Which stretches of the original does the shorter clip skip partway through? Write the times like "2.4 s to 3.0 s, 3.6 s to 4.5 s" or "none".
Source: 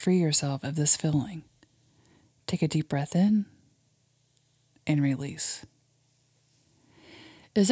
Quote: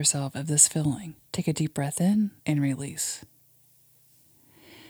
1.5 s to 2.4 s, 3.5 s to 4.8 s